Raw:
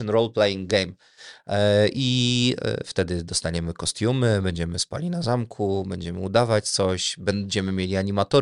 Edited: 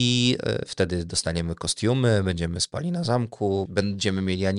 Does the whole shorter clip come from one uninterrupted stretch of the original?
no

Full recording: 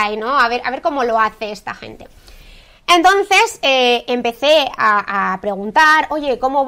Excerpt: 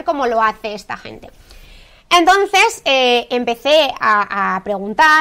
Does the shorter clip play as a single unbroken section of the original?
yes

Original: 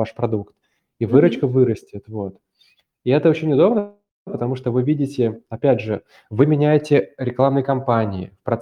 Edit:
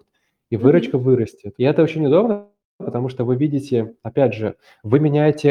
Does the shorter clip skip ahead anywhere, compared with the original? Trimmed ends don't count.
yes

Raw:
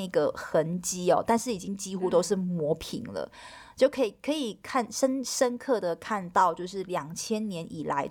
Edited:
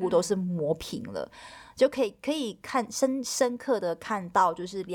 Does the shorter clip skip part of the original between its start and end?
no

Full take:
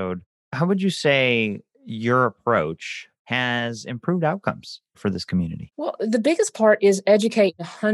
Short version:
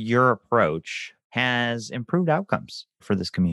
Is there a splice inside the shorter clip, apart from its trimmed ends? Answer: no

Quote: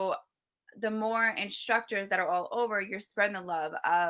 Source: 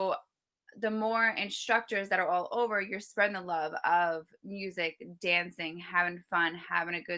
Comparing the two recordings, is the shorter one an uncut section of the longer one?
yes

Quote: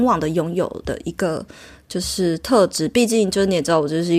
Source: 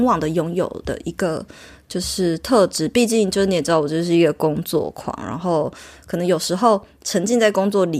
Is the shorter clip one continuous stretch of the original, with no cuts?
yes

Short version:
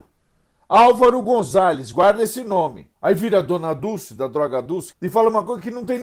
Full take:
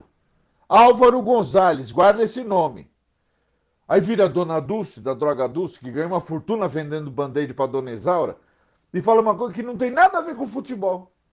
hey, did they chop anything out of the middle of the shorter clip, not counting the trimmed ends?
yes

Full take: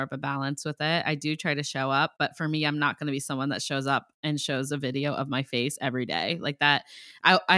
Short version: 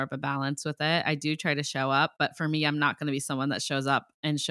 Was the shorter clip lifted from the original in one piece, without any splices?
yes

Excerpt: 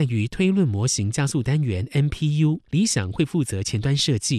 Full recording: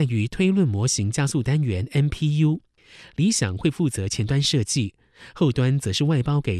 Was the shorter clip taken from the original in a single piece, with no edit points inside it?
no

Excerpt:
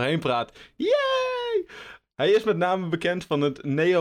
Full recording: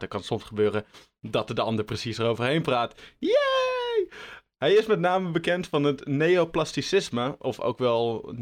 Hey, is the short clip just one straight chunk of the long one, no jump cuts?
yes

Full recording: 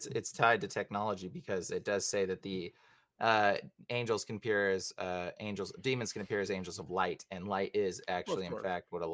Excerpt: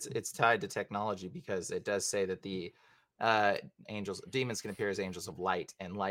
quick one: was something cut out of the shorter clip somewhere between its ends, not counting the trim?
yes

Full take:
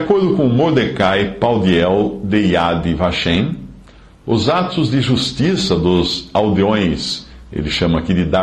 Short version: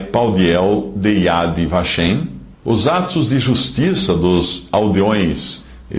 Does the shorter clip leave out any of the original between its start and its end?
yes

